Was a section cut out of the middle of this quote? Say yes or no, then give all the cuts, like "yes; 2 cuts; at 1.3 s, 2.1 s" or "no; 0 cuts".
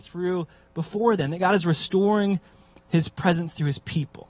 no; 0 cuts